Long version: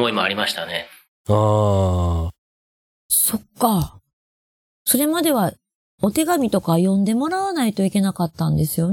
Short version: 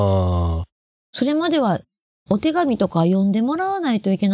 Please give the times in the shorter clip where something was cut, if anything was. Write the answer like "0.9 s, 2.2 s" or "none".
1.0 s